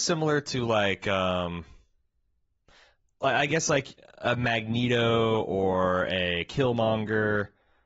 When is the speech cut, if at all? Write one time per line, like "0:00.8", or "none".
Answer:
none